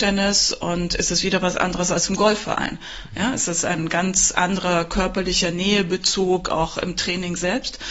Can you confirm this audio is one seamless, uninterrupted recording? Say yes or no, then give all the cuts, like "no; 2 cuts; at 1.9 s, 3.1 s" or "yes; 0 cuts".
yes; 0 cuts